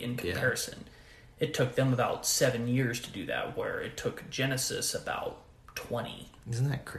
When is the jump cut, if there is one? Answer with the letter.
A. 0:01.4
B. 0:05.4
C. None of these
C